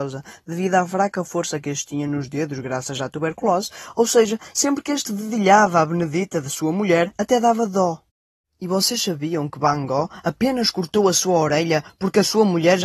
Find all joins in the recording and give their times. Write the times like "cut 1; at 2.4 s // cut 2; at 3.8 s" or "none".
none